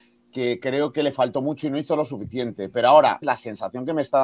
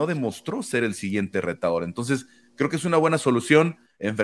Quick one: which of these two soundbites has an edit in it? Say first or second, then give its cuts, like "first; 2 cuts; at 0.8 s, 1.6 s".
first; 1 cut; at 3.2 s